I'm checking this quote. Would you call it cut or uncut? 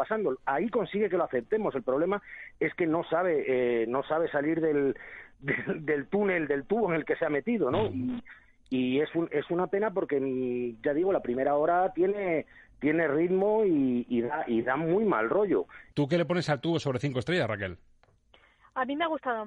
uncut